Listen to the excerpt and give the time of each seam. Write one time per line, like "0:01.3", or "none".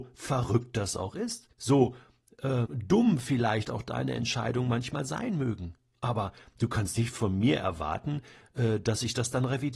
0:01.5
0:02.7